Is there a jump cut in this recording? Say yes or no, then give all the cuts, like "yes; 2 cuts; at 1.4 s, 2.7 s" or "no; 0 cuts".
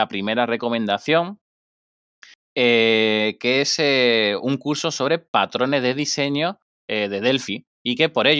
no; 0 cuts